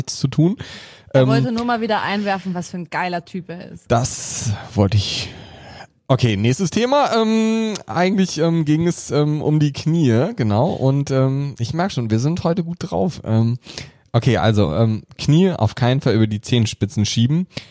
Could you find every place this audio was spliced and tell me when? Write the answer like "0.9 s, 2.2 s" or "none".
none